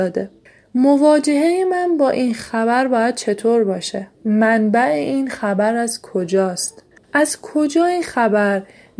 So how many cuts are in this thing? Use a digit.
2